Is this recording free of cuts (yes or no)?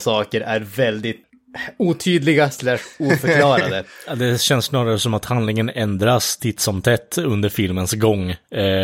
no